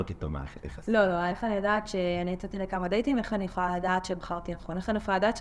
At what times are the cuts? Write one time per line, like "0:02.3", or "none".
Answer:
0:01.3

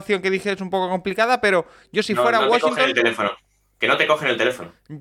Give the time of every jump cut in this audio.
none

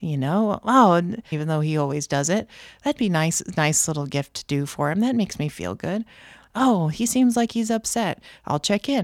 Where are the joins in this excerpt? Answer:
0:01.3

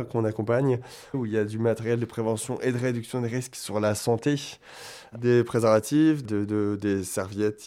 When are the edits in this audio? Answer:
0:01.1
0:06.2

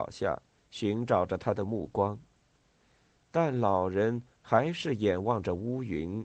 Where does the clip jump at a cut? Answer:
none

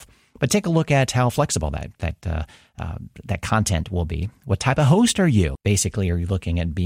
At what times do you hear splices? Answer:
0:05.6

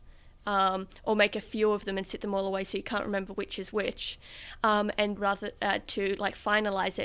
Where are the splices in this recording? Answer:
0:05.2

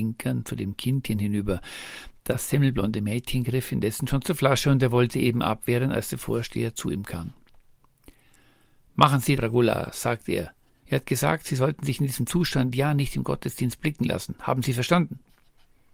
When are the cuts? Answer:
0:09.4
0:10.8

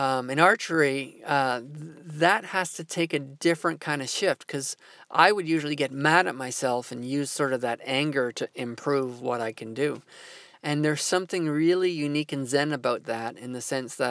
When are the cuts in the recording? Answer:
0:10.5

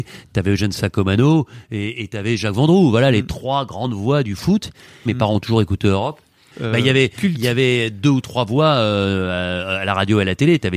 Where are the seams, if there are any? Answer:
0:05.1
0:06.5

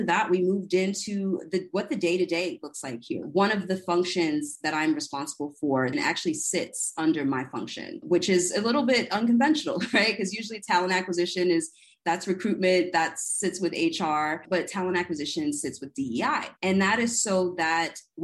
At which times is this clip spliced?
0:05.9
0:16.6

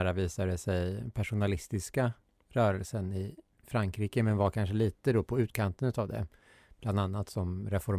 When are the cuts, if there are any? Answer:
none

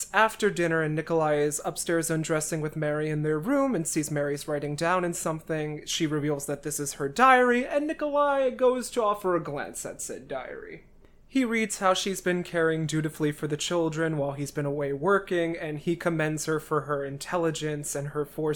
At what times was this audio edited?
none

